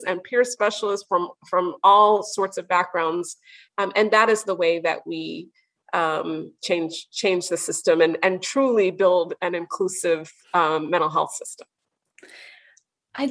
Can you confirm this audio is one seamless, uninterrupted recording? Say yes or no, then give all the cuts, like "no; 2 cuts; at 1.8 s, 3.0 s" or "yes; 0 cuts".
yes; 0 cuts